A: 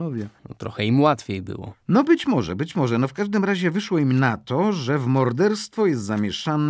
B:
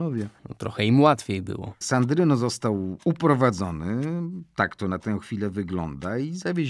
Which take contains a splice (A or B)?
B